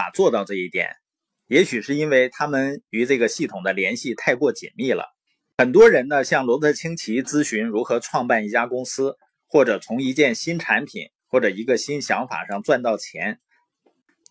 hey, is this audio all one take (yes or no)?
yes